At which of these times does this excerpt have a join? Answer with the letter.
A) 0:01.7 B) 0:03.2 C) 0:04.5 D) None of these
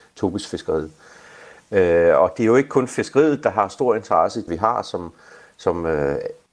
C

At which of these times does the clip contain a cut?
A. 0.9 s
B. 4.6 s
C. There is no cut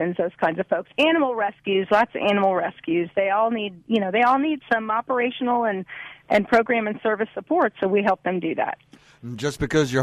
B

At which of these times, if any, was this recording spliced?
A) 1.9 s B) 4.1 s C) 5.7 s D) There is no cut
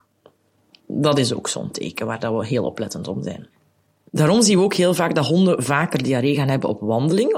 B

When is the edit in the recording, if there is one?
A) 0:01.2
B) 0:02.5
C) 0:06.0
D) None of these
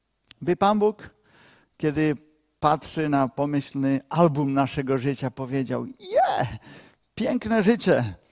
D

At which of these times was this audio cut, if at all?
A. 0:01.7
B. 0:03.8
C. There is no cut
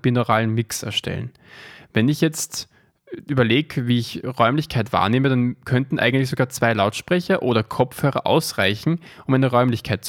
A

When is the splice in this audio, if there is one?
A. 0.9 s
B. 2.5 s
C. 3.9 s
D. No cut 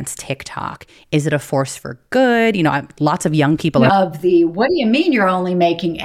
C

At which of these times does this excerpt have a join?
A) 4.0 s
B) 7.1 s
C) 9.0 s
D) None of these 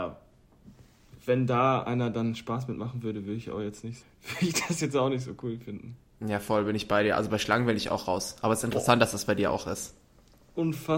A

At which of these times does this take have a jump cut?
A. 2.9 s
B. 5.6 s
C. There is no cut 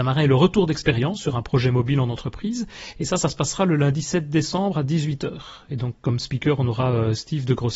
C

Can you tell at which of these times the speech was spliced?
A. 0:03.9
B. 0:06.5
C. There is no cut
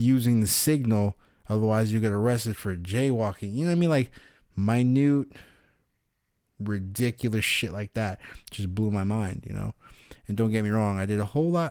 C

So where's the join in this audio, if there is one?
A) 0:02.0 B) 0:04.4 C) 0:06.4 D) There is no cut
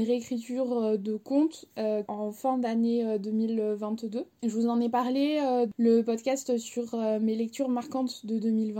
A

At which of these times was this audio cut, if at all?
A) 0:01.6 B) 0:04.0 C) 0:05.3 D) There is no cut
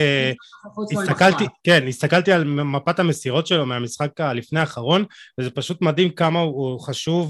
A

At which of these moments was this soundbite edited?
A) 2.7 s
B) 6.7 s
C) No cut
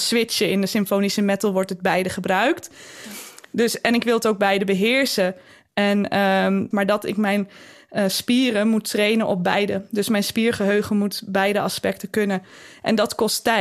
B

